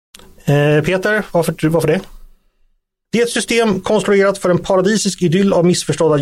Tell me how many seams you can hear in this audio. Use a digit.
1